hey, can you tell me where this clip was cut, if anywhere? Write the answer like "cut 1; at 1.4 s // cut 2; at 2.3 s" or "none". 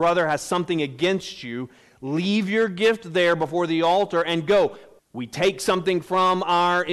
cut 1; at 5.0 s